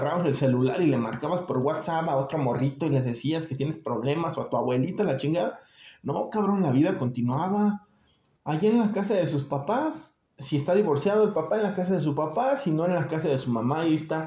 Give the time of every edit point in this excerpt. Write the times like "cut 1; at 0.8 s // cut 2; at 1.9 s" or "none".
cut 1; at 8.4 s // cut 2; at 10.3 s